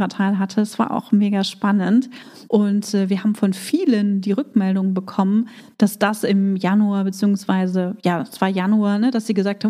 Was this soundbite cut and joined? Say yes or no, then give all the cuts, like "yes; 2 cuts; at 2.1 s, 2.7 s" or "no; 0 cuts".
yes; 1 cut; at 2.5 s